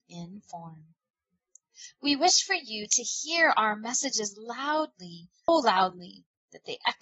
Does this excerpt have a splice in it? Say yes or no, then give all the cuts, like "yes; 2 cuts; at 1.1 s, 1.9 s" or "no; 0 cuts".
yes; 1 cut; at 5.5 s